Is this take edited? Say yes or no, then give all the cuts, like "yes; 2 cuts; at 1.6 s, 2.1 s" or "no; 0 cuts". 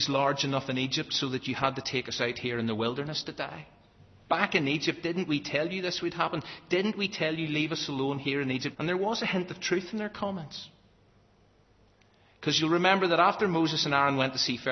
yes; 2 cuts; at 4.3 s, 8.7 s